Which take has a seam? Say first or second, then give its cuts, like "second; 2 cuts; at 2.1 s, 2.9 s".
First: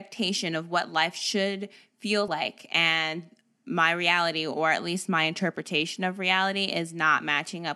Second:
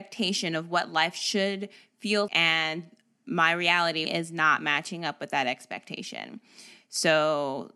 second; 2 cuts; at 2.3 s, 4.0 s